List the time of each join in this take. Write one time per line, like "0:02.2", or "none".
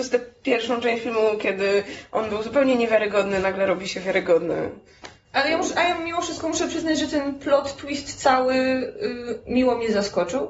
none